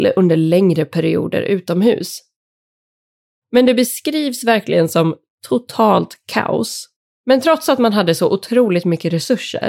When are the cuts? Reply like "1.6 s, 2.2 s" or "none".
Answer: 3.4 s, 7.2 s